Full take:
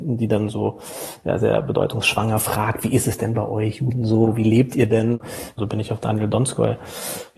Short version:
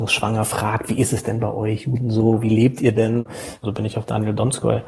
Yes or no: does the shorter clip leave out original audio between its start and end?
no